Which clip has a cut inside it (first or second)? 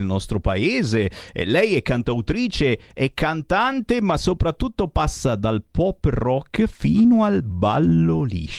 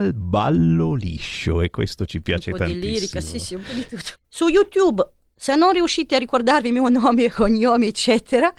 second